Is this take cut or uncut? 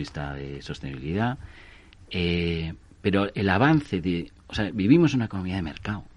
uncut